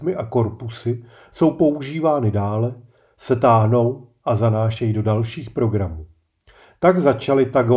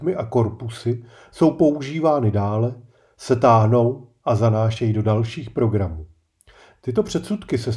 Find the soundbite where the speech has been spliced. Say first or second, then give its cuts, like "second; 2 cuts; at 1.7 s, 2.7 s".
second; 1 cut; at 6.8 s